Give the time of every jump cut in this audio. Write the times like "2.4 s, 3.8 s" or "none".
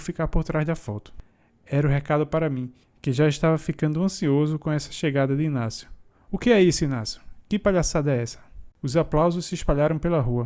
6.3 s, 8.7 s